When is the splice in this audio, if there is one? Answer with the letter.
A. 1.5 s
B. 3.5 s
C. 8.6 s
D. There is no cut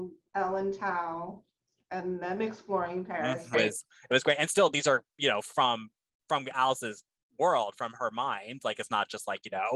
B